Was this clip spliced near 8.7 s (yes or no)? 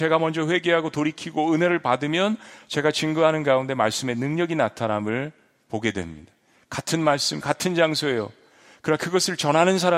no